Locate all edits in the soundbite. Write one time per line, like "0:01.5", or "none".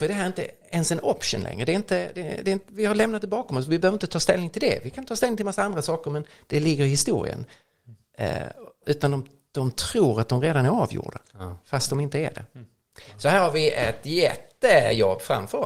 0:08.8